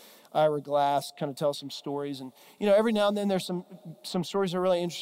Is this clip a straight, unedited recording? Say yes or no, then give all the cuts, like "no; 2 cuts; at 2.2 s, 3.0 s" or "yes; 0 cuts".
yes; 0 cuts